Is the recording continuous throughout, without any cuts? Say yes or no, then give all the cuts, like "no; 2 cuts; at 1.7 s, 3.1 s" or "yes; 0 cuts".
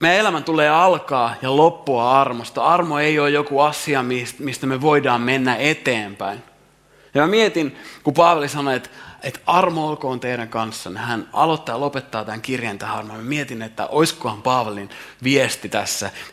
yes; 0 cuts